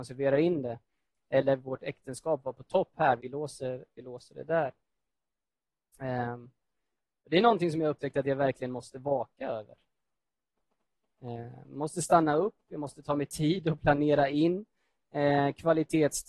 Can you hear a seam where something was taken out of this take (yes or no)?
yes